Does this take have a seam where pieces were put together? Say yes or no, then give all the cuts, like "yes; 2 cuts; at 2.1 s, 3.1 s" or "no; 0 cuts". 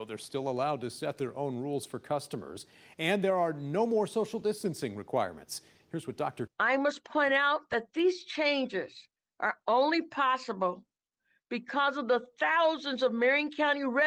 yes; 1 cut; at 6.5 s